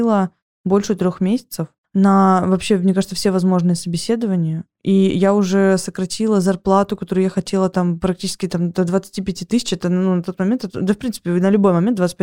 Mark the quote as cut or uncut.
uncut